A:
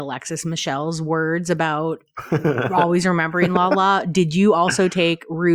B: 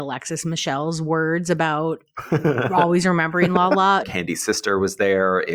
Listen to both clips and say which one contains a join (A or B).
B